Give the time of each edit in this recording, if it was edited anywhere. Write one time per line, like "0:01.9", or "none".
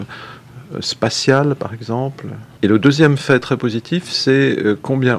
0:02.6